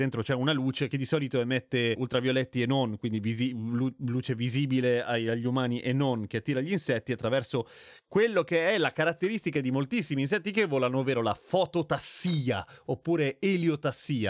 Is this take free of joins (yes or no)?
yes